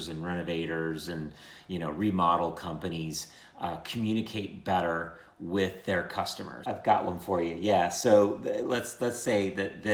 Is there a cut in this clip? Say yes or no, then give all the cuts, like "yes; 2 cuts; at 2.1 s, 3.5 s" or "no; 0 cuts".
yes; 1 cut; at 6.6 s